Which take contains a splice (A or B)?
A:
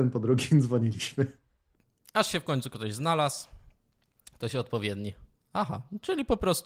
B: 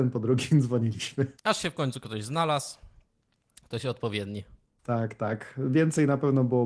B